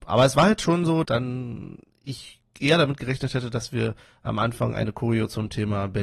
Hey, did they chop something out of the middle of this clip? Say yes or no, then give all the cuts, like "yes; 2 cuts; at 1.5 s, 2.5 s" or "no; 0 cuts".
yes; 1 cut; at 1.0 s